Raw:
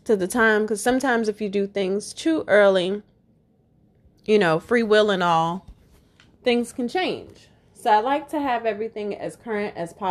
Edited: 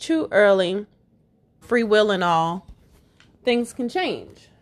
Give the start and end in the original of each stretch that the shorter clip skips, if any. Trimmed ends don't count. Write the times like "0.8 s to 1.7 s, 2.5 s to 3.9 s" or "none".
3.8 s to 4.6 s